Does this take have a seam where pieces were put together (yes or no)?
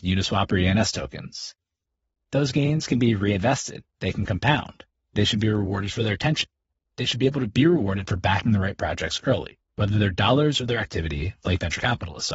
yes